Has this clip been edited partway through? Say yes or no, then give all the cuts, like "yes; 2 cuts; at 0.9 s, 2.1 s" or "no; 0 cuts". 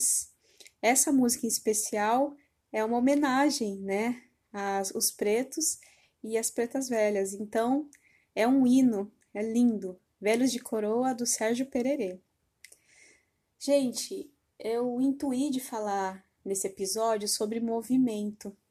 no; 0 cuts